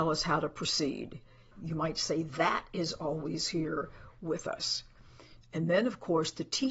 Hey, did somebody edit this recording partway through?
yes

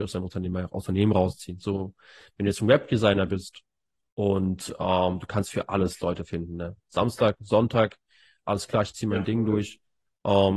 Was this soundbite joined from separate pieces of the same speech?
yes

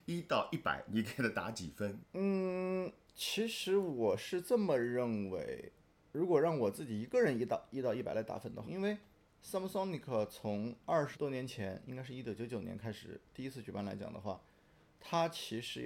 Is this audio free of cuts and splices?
no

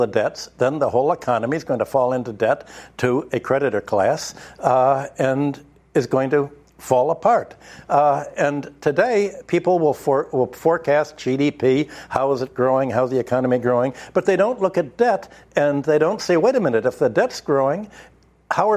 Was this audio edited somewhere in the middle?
no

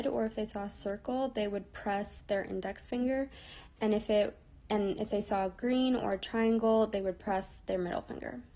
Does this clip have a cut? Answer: no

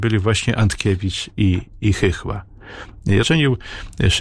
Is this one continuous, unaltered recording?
no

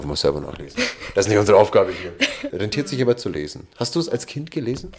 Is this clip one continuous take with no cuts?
no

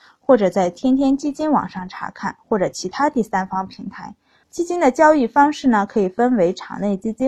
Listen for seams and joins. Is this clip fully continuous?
no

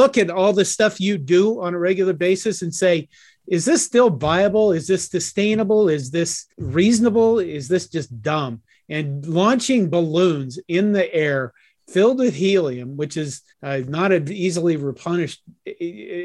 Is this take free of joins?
no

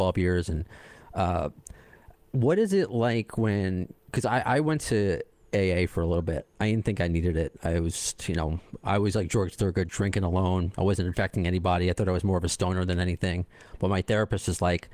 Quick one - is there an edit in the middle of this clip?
yes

